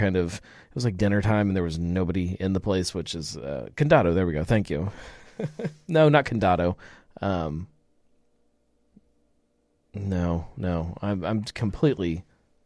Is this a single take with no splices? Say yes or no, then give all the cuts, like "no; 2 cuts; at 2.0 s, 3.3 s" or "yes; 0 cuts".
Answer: yes; 0 cuts